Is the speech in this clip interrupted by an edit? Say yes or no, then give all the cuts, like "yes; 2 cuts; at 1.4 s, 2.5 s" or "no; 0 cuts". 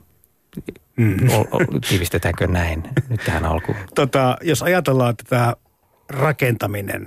no; 0 cuts